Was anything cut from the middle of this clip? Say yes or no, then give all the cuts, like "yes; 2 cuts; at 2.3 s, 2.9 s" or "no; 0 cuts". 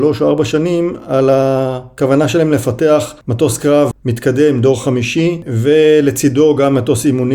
no; 0 cuts